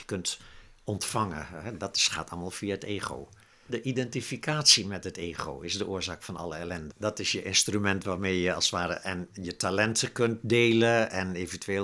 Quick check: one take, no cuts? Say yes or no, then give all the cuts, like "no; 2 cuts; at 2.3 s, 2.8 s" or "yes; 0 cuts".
no; 2 cuts; at 3.7 s, 6.9 s